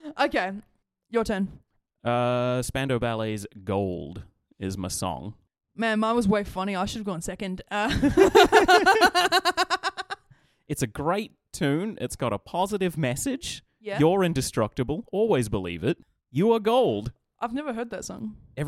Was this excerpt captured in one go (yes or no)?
yes